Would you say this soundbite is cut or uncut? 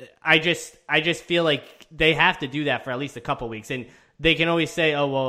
uncut